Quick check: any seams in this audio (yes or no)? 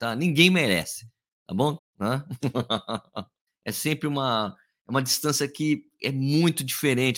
yes